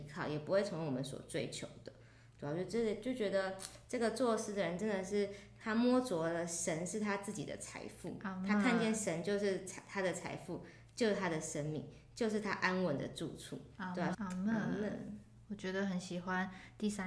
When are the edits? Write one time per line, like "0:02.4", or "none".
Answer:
0:14.1